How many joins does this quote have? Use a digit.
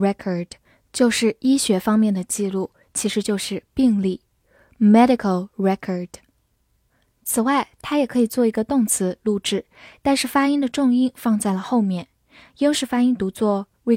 1